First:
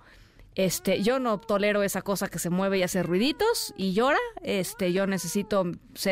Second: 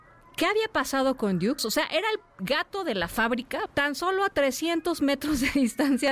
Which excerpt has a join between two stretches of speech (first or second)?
second